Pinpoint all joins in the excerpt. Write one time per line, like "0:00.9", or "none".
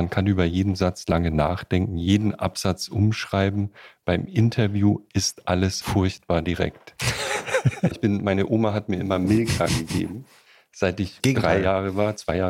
0:05.8
0:07.9
0:11.2